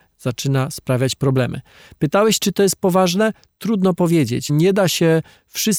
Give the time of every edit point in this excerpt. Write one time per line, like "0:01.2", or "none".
0:04.5